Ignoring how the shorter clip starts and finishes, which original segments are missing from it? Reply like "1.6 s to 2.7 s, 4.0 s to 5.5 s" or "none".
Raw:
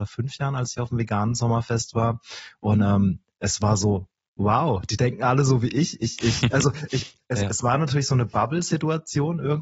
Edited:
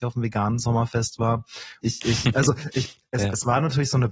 2.6 s to 6.0 s

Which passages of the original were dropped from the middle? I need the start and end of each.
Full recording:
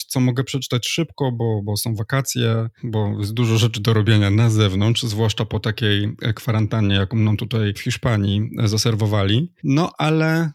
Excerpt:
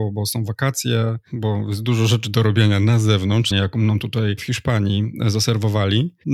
5.0 s to 6.9 s

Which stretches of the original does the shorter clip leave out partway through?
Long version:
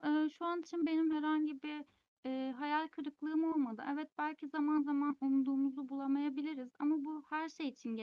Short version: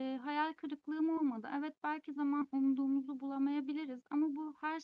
4.5 s to 4.8 s

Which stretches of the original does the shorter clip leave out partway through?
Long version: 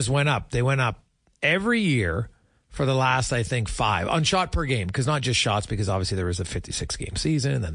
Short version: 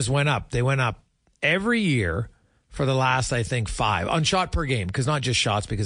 none

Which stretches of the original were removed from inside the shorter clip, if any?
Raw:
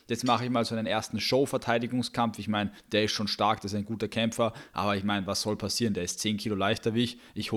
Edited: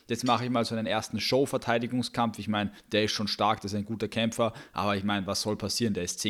none

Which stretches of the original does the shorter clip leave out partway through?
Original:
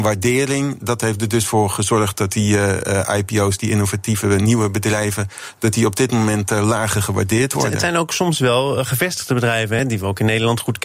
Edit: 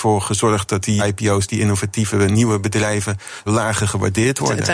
2.5 s to 3.1 s, 5.6 s to 6.6 s

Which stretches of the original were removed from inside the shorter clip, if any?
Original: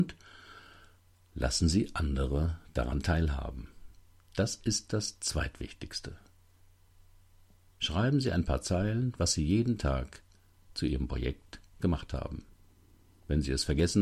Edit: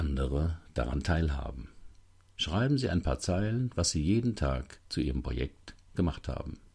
4.3 s to 7.7 s, 10.3 s to 10.7 s

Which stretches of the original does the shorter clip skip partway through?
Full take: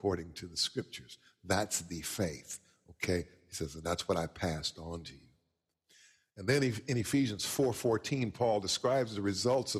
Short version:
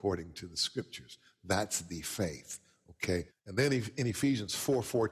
3.3 s to 6.2 s

